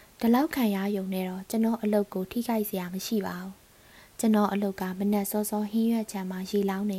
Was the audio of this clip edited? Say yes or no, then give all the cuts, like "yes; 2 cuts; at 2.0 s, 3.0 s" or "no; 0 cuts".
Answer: no; 0 cuts